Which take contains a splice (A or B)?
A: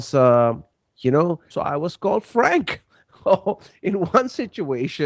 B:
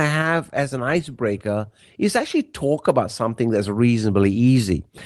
A